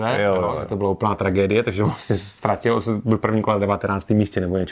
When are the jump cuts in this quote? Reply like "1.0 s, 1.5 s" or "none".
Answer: none